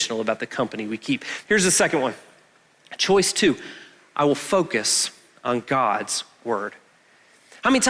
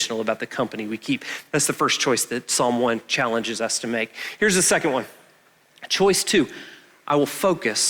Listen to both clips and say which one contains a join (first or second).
first